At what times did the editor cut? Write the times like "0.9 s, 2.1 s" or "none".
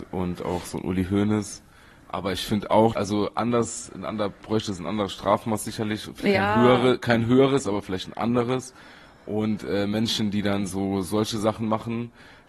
2.9 s